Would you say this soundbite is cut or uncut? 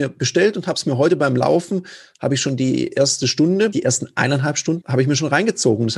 cut